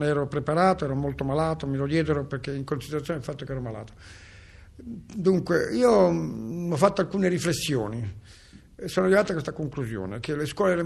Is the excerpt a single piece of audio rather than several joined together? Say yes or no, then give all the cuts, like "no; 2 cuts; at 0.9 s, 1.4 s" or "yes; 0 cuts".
no; 1 cut; at 2.3 s